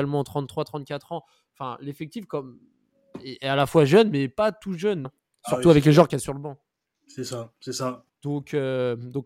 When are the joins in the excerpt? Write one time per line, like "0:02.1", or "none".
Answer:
0:05.0
0:08.1